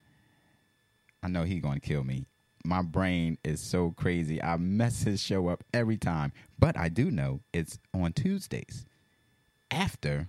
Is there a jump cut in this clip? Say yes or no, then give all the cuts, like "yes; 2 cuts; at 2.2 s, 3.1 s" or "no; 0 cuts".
no; 0 cuts